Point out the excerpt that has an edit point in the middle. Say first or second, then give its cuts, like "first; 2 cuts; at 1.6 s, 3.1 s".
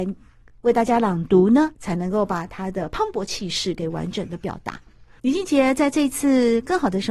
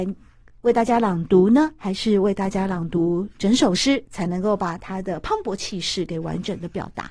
first; 2 cuts; at 1.7 s, 5.2 s